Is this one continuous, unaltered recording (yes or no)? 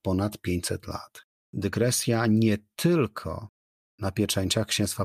no